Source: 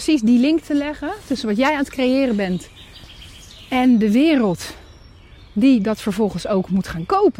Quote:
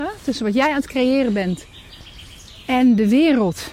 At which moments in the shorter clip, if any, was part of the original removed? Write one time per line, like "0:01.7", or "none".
none